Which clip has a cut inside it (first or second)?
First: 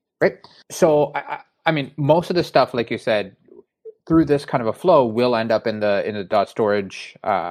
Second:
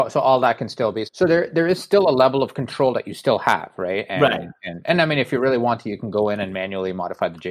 second